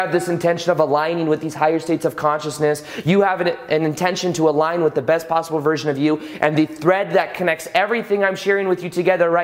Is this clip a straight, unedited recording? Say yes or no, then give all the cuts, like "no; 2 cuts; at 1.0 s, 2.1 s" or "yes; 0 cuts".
yes; 0 cuts